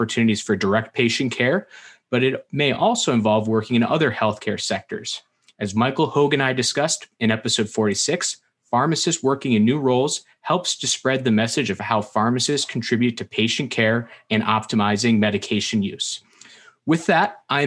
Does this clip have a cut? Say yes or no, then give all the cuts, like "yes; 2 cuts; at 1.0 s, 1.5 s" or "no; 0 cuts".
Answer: no; 0 cuts